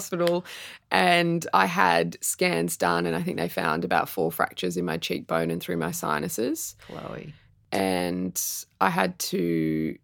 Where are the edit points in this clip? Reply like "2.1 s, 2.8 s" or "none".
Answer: none